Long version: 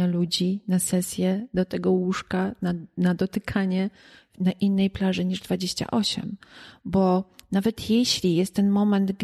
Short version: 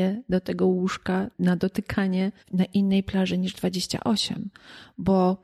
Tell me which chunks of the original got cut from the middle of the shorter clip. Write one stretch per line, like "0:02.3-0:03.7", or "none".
0:02.6-0:02.9
0:04.0-0:04.3

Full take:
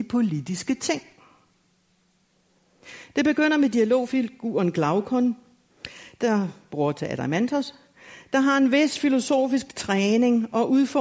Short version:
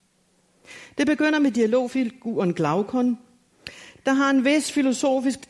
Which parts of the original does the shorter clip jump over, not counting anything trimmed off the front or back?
0:06.1-0:08.2

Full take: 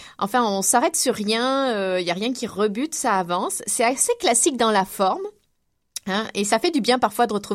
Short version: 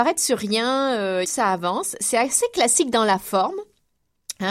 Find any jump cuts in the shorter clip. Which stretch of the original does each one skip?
0:02.0-0:02.9

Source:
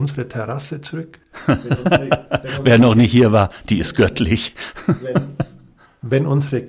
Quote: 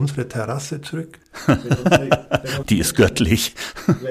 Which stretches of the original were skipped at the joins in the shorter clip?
0:02.6-0:03.6

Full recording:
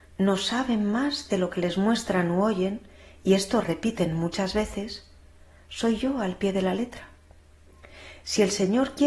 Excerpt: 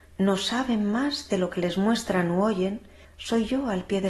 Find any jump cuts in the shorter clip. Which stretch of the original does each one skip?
0:03.0-0:05.6

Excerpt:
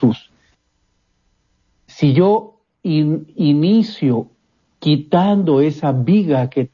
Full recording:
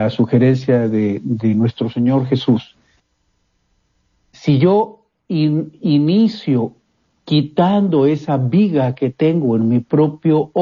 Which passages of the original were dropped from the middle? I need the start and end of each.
none

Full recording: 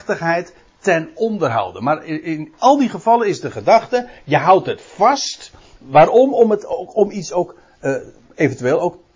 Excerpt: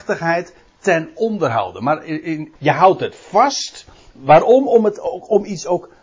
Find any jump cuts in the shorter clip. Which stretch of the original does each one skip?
0:02.6-0:04.2

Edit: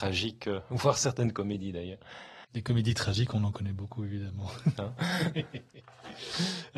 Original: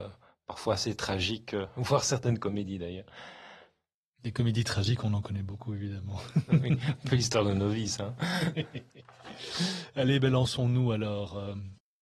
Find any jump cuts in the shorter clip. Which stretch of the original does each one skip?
0:03.5-0:04.1
0:06.5-0:08.0

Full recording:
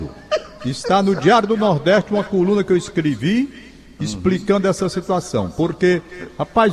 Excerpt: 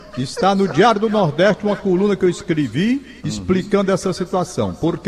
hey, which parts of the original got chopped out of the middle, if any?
0:03.7-0:03.9

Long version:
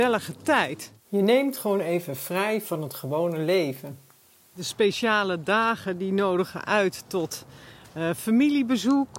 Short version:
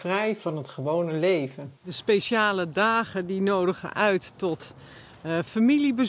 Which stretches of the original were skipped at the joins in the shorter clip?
0:04.0-0:04.5

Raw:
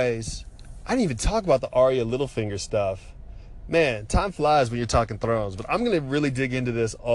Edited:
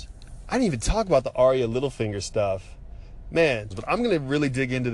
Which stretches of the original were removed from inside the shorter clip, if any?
0:04.1-0:05.5

